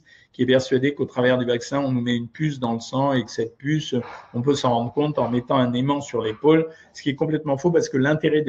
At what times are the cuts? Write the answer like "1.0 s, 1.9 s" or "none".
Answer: none

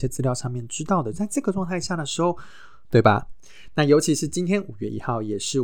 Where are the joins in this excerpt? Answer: 2.8 s

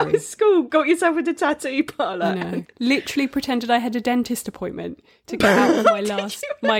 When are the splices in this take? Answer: 2.7 s

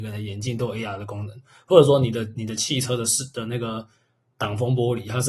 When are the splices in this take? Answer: none

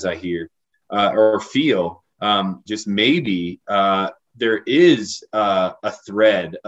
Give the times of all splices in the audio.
2.7 s

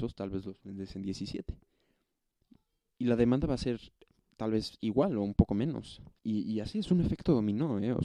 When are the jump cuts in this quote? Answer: 6.2 s

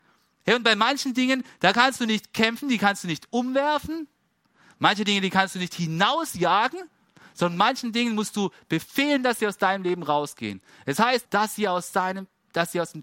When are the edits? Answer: 11.2 s

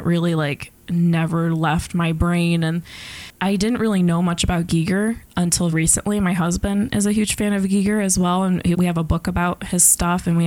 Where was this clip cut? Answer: 5.7 s, 8.7 s

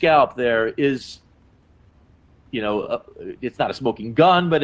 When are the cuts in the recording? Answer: none

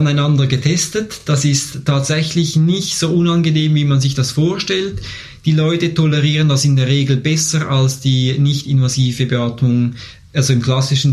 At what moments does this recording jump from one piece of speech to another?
none

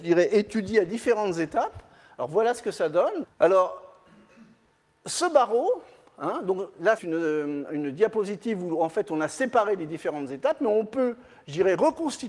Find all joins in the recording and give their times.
3.2 s, 7.0 s

